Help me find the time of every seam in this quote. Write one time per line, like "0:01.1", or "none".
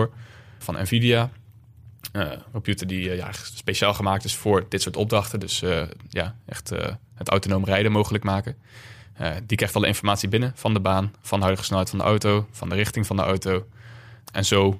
none